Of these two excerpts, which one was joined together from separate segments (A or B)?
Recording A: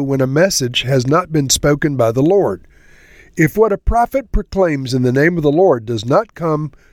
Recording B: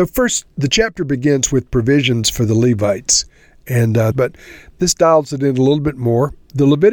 B